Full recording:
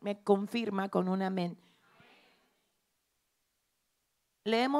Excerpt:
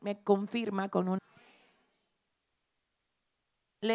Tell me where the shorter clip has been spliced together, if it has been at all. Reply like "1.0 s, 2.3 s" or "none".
1.2 s